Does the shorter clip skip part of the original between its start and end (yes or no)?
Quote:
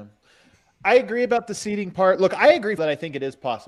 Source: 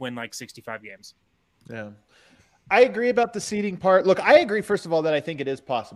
yes